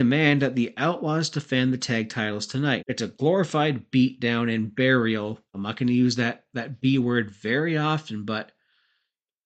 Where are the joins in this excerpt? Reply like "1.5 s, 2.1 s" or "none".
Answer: 2.8 s, 5.5 s